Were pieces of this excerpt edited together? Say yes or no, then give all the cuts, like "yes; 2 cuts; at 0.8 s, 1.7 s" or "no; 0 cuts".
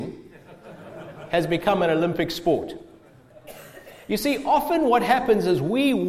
no; 0 cuts